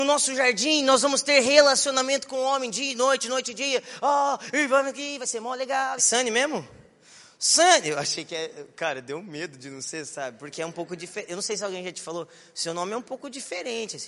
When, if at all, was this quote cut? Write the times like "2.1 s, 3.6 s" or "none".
6.0 s